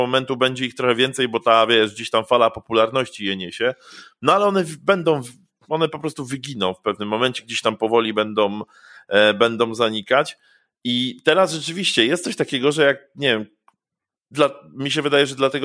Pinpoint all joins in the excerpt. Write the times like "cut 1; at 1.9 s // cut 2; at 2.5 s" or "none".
none